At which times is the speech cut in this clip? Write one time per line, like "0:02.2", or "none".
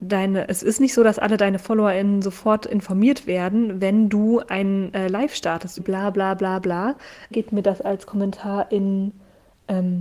0:05.8
0:07.3

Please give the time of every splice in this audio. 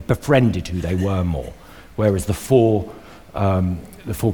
none

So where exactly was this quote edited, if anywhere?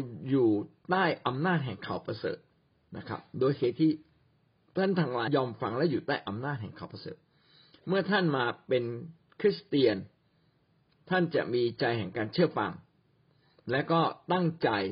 0:05.3

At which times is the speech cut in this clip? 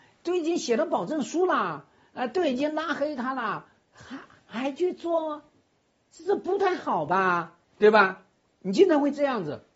0:06.2
0:07.7

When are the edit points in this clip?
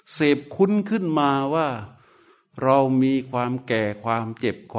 none

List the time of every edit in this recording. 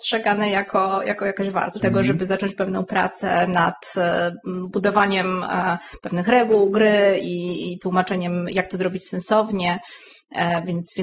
0:01.8

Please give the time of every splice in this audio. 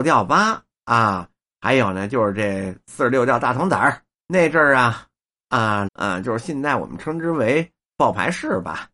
0:04.1
0:05.9

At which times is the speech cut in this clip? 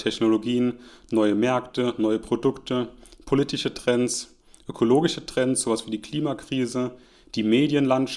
none

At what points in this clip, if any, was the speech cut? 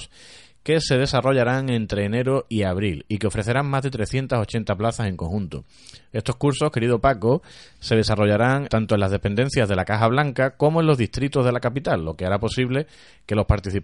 0:08.7

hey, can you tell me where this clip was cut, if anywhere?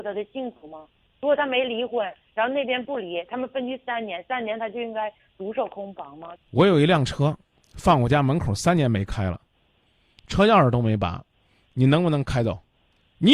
0:06.4

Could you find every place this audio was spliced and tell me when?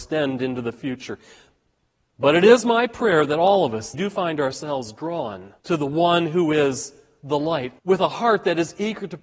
0:03.9
0:05.6
0:07.8

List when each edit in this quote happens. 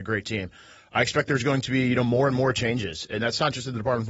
none

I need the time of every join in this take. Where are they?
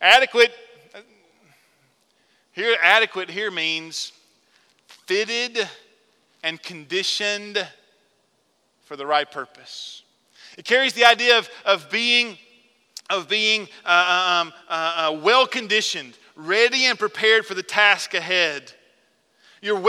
none

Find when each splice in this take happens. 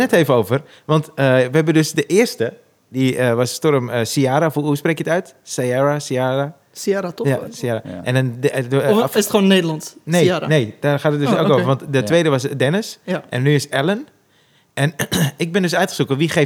none

